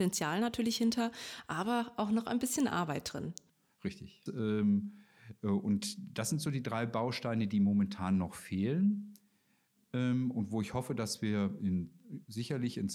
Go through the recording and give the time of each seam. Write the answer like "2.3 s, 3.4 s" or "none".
4.3 s